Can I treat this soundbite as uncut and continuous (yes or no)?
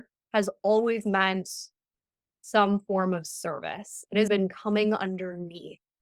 no